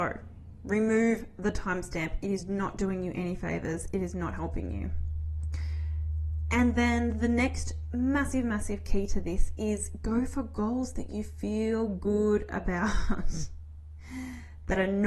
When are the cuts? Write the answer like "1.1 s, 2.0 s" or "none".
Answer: none